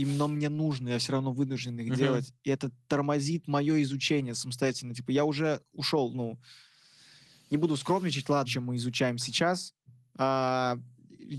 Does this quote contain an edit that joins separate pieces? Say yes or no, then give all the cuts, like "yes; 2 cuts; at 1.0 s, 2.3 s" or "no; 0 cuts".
yes; 1 cut; at 8.5 s